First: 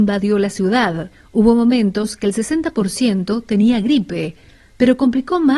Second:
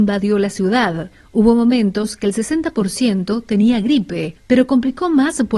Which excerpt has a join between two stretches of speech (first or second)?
second